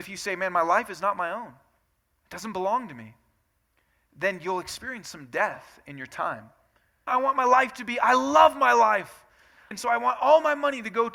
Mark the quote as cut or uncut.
cut